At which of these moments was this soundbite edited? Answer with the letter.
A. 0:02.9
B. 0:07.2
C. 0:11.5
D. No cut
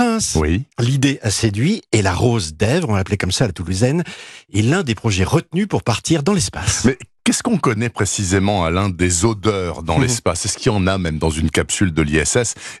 D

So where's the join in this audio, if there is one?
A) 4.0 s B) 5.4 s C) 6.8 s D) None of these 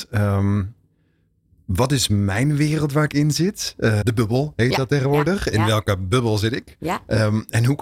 A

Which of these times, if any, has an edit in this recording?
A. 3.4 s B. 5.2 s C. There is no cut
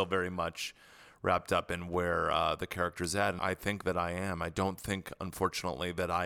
A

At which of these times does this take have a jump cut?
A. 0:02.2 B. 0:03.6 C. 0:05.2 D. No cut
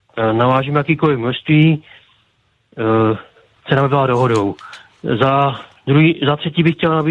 B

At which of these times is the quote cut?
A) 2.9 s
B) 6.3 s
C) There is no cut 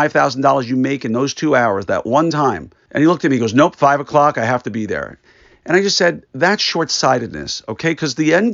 A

